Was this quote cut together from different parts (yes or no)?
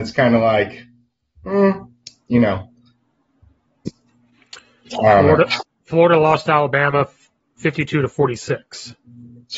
no